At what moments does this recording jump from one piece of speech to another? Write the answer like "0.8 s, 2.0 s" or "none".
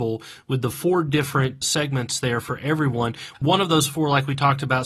3.3 s

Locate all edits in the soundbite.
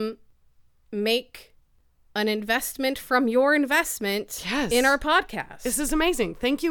none

